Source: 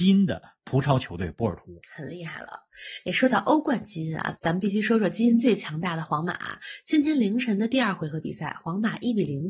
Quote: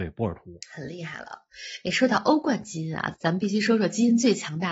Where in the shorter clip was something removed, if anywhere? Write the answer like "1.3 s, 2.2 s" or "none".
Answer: none